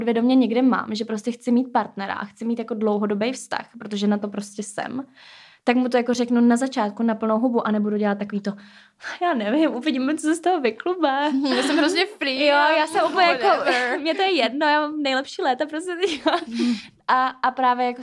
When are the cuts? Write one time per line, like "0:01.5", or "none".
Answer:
none